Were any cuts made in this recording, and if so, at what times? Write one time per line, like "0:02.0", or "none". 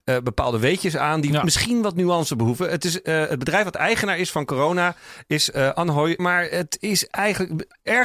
0:06.2